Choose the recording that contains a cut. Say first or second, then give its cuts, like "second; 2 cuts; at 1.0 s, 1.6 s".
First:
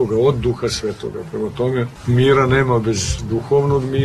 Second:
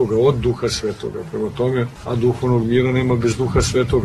second; 1 cut; at 2.0 s